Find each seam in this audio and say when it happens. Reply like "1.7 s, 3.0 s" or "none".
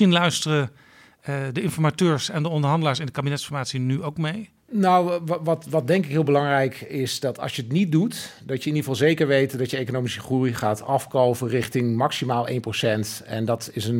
none